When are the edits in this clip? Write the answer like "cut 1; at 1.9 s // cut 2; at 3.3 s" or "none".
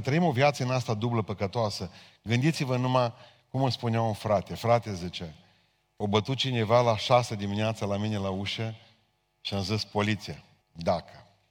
cut 1; at 10.6 s